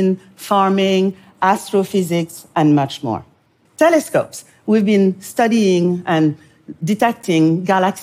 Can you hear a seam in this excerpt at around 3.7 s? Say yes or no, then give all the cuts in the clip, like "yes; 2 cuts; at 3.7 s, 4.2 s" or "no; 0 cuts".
yes; 1 cut; at 3.7 s